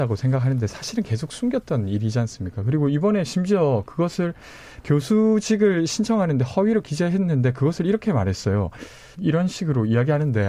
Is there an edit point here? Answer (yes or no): yes